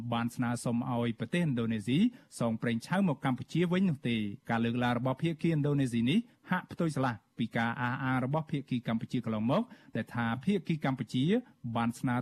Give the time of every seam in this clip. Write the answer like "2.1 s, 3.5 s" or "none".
4.4 s